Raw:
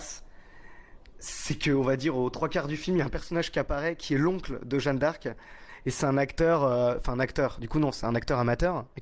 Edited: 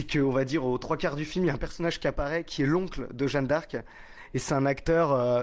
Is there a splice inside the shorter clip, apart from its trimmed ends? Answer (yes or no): no